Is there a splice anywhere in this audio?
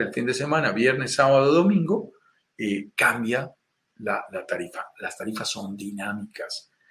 no; 0 cuts

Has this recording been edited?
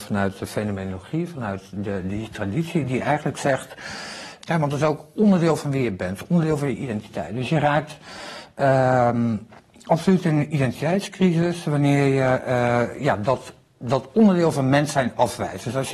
yes; 1 cut; at 4.4 s

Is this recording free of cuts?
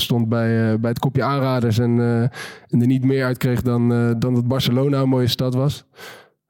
yes; 0 cuts

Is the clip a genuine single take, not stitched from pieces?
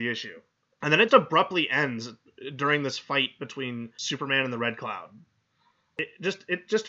no; 1 cut; at 1.1 s

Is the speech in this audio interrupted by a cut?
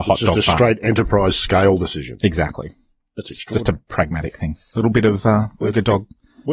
no; 0 cuts

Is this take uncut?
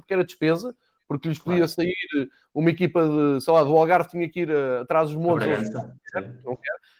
yes; 0 cuts

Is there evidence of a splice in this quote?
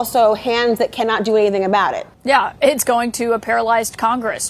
yes; 1 cut; at 2.1 s

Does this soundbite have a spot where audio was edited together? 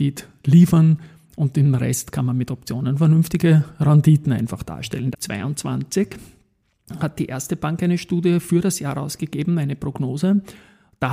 yes; 1 cut; at 5.1 s

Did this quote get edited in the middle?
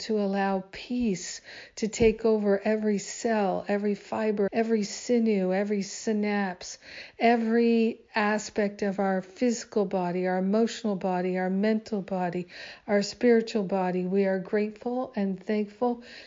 yes; 1 cut; at 4.5 s

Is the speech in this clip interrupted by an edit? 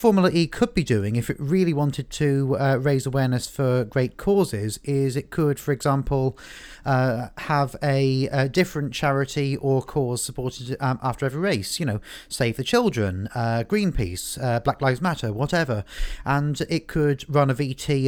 no; 0 cuts

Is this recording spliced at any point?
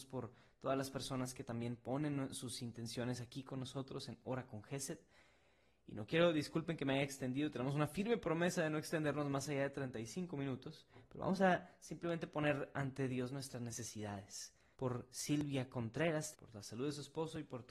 yes; 2 cuts; at 14.7 s, 16.3 s

